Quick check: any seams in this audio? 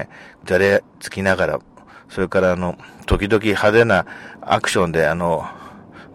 no; 0 cuts

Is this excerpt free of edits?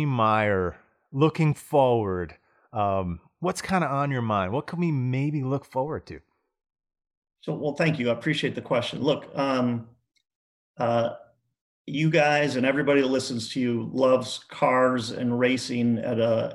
yes; 0 cuts

